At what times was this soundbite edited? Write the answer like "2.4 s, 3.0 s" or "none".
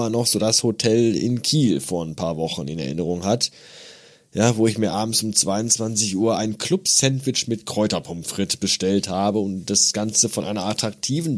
none